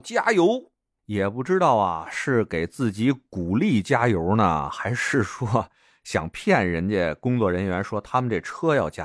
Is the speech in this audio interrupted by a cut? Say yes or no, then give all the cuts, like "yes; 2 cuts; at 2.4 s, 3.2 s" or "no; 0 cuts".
no; 0 cuts